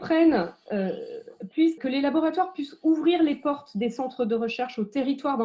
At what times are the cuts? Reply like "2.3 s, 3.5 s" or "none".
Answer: 1.8 s